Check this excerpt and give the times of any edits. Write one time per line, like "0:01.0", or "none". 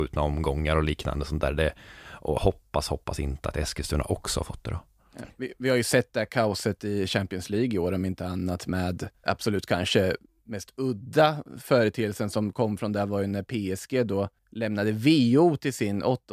0:09.2
0:14.4